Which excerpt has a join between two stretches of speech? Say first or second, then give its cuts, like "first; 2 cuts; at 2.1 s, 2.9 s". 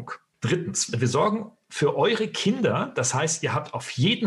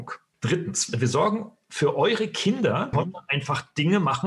second; 1 cut; at 2.9 s